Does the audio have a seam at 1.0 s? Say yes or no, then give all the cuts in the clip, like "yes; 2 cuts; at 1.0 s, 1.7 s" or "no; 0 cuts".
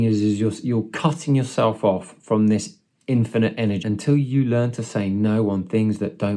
no; 1 cut; at 3.8 s